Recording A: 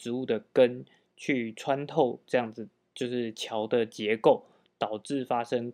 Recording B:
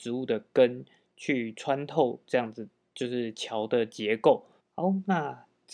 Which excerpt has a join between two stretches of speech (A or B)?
B